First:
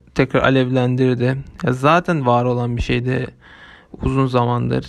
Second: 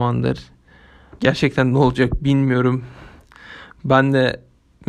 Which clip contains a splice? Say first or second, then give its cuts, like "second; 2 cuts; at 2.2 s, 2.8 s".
second; 1 cut; at 1.2 s